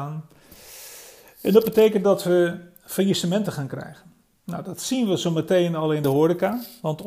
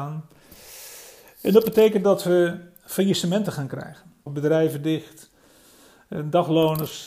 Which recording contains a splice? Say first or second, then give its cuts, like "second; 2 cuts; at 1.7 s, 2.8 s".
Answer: second; 1 cut; at 4.3 s